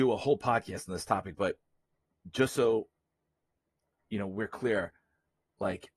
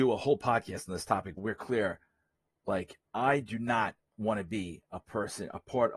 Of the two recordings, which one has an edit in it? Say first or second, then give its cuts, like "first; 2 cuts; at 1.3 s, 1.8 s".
second; 2 cuts; at 1.4 s, 3.1 s